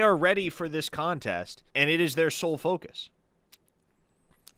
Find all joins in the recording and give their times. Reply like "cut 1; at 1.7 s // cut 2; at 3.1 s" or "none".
cut 1; at 1.7 s